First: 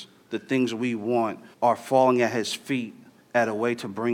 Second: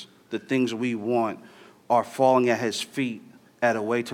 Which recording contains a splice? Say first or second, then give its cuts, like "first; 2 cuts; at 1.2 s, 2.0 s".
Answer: first; 1 cut; at 1.5 s